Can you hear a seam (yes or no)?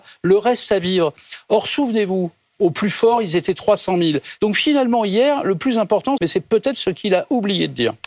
yes